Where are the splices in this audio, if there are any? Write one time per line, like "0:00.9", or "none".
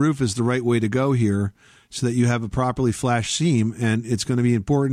none